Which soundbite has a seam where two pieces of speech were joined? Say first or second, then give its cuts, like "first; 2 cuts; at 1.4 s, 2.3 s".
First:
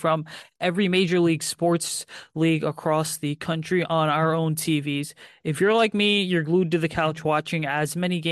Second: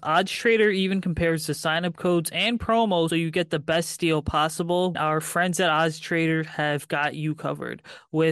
second; 2 cuts; at 3.1 s, 4.9 s